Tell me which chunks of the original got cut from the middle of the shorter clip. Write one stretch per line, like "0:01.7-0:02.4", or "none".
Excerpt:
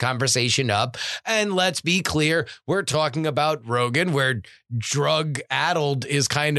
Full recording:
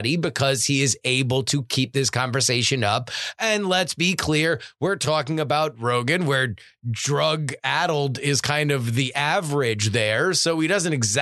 none